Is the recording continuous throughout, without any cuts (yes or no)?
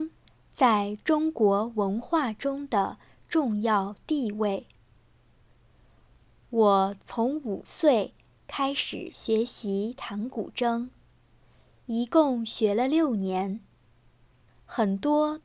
yes